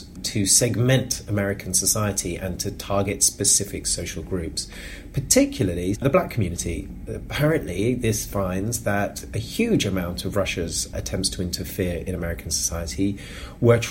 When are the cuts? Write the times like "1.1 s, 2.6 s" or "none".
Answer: 5.9 s